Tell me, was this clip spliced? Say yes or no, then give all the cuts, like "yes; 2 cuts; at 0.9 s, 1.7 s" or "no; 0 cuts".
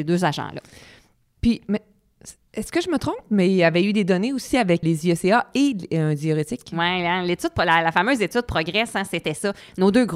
yes; 1 cut; at 4.8 s